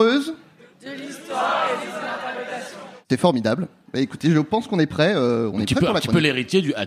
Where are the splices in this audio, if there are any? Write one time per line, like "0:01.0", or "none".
none